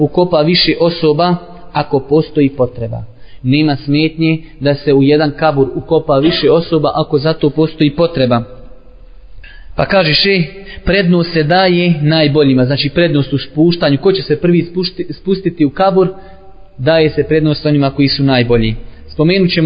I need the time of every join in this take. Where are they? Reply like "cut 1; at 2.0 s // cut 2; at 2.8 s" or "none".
none